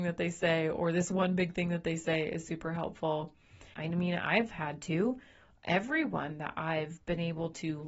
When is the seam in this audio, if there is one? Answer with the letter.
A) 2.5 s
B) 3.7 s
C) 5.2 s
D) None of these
B